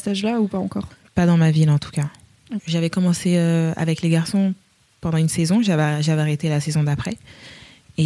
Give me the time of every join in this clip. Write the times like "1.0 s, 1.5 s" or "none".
2.6 s